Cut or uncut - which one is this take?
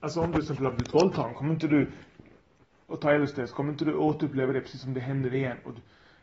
uncut